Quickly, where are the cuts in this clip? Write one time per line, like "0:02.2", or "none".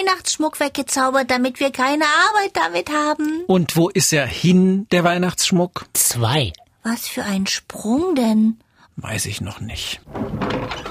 0:06.6
0:08.9